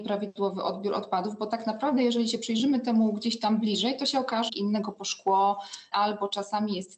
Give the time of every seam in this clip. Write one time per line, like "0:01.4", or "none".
0:04.5
0:05.9

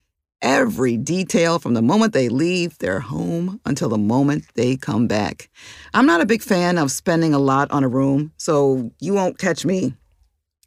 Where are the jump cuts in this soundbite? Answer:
0:05.8

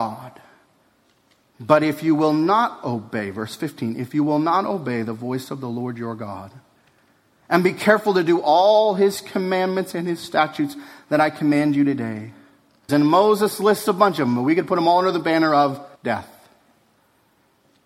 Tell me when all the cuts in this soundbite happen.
0:01.4
0:12.9
0:15.9

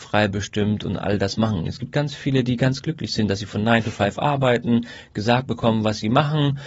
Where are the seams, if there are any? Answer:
none

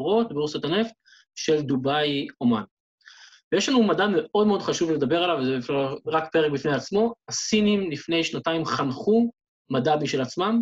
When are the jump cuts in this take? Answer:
none

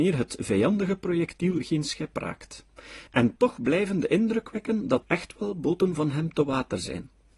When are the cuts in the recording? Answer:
0:05.0

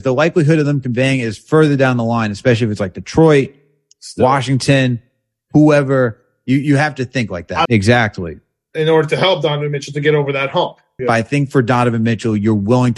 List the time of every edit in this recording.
0:07.7
0:11.0

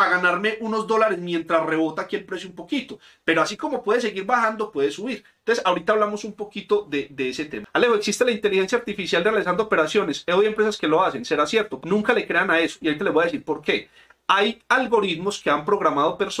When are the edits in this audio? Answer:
0:11.8

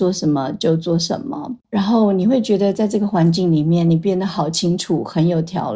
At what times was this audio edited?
none

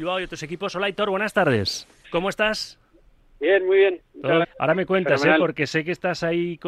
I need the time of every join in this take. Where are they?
0:02.0
0:04.4

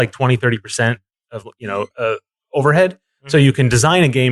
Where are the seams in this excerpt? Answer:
0:01.9

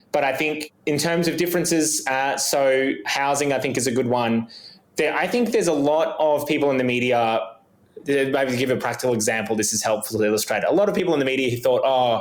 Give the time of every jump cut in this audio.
none

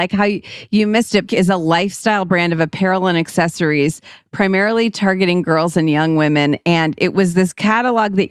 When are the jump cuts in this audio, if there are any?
0:01.3

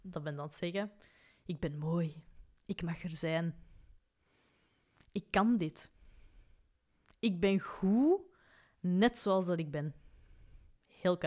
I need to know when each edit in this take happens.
none

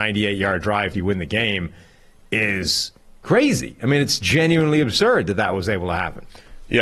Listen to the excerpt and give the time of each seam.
0:00.9

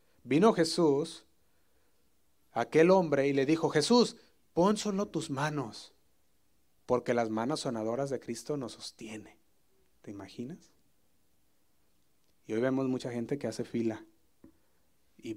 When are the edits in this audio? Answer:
0:06.8

